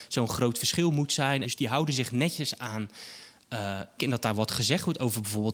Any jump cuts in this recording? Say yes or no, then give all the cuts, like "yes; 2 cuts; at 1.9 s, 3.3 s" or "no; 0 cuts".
yes; 2 cuts; at 1.4 s, 4.0 s